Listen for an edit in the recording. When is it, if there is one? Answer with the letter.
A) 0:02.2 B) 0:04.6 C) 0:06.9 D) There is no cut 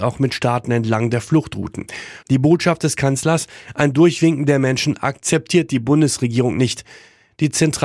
A